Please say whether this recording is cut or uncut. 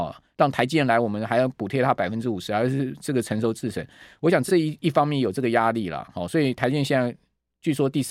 uncut